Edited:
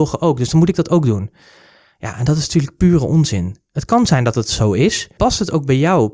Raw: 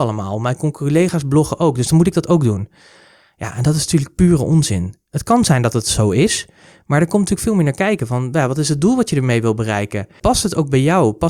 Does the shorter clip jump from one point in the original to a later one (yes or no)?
yes